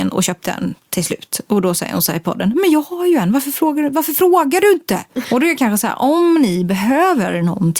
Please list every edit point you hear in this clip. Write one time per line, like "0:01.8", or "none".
0:05.2